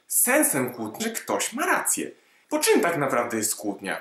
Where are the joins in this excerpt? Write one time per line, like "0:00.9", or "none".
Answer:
0:01.0
0:02.4